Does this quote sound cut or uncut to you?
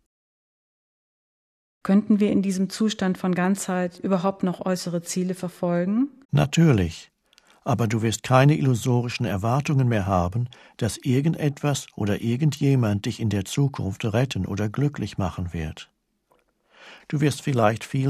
cut